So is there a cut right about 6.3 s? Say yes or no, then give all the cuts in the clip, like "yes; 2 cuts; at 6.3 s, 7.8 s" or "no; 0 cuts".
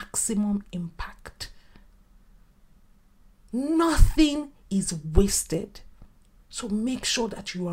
yes; 1 cut; at 6.3 s